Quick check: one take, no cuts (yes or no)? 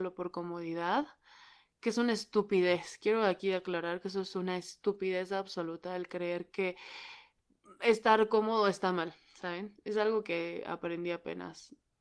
yes